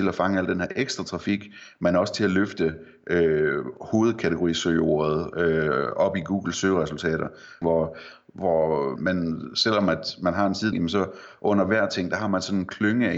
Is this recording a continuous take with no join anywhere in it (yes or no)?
no